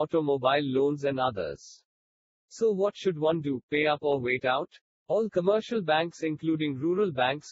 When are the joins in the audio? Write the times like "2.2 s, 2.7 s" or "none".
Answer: 2.3 s, 5.0 s

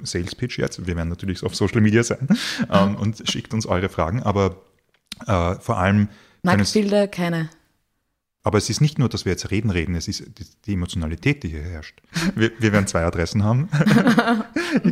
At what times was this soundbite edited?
8.4 s, 12.1 s

